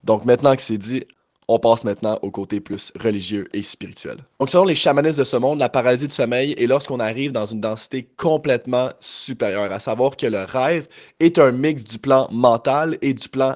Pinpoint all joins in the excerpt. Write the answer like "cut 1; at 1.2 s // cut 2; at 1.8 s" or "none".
none